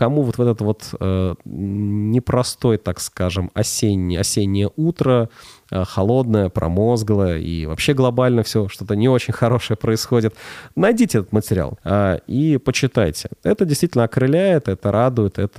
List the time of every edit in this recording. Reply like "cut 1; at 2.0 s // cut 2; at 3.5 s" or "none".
cut 1; at 11.8 s